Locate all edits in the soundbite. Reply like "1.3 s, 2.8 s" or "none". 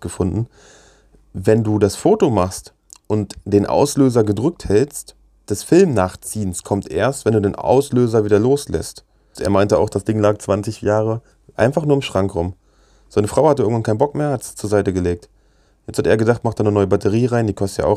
5.5 s, 9.4 s